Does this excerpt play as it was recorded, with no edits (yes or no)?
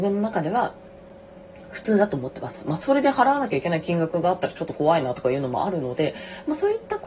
yes